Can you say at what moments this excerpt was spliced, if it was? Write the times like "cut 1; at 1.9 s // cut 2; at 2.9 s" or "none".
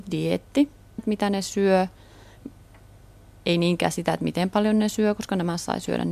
cut 1; at 1.0 s

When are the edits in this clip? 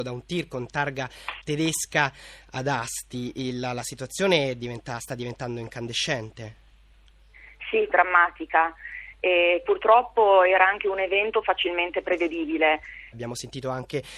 cut 1; at 7.9 s // cut 2; at 13.1 s

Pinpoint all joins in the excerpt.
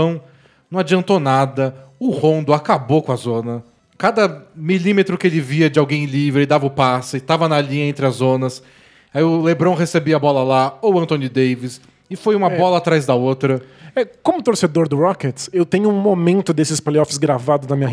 none

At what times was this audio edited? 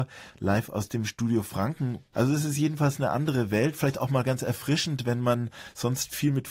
cut 1; at 2.1 s

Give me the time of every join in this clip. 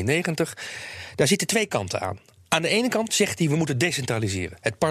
cut 1; at 3.1 s

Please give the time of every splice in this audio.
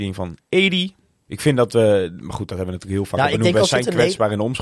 cut 1; at 1.3 s

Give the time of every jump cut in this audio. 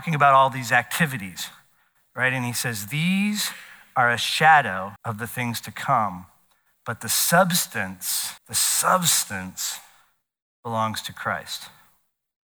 cut 1; at 5.0 s // cut 2; at 8.4 s

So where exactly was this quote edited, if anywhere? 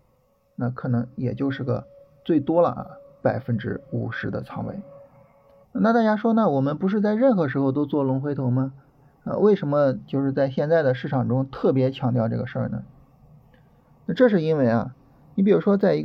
cut 1; at 5.6 s

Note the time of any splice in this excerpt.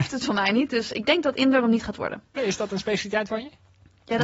cut 1; at 2.4 s

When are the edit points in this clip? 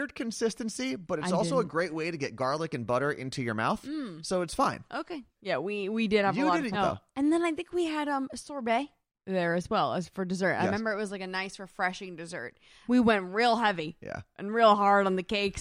cut 1; at 5.4 s // cut 2; at 6.7 s // cut 3; at 12.8 s

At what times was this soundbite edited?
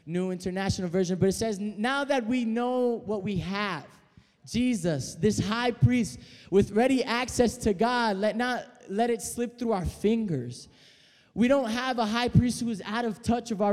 none

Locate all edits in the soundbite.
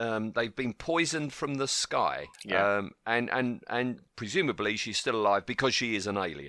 cut 1; at 2.3 s

